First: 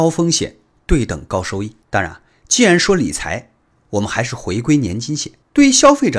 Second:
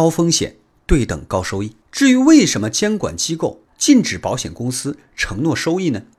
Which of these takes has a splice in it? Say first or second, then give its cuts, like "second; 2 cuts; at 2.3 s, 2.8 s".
second; 1 cut; at 1.8 s